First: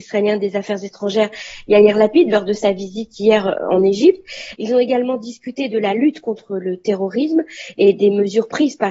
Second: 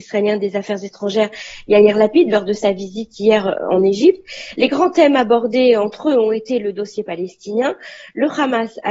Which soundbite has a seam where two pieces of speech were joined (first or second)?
first